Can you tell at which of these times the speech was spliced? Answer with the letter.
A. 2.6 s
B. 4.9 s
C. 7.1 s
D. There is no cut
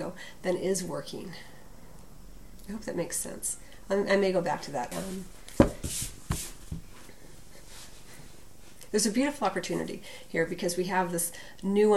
B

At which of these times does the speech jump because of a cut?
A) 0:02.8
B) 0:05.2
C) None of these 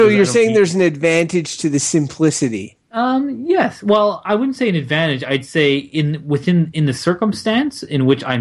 A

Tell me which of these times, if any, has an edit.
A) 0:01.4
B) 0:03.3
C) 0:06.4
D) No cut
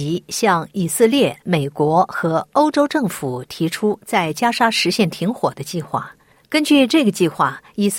A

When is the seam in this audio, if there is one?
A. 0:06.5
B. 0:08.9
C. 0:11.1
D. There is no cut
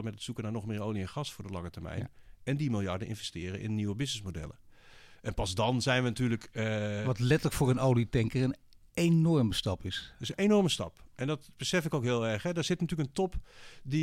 D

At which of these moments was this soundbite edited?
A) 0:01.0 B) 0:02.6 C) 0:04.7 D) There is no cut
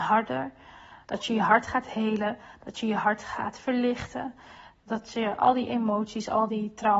A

